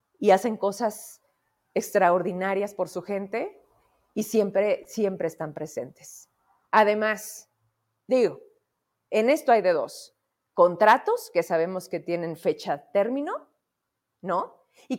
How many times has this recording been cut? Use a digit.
1